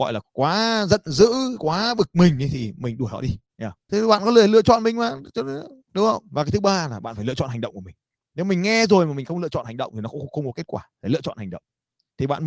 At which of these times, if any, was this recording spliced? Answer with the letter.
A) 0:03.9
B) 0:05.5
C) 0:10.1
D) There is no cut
A